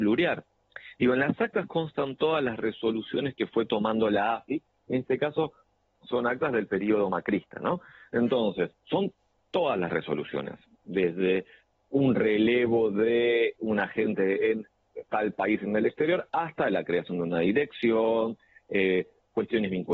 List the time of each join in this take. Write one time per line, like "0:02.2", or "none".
none